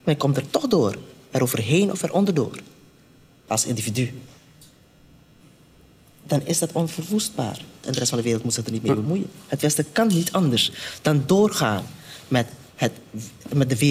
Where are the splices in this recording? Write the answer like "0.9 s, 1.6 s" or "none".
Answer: 3.5 s, 7.8 s